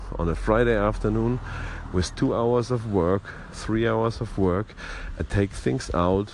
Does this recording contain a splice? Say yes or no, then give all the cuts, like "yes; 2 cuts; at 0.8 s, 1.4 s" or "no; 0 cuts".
no; 0 cuts